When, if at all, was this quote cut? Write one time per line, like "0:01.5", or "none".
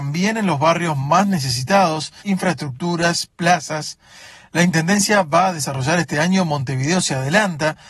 0:02.2